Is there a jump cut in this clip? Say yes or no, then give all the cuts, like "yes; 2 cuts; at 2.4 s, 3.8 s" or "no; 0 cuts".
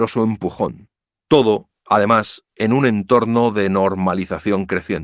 no; 0 cuts